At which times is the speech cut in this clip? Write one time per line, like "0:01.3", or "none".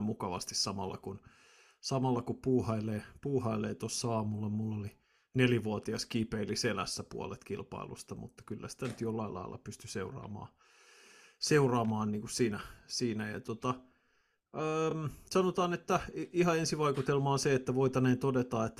none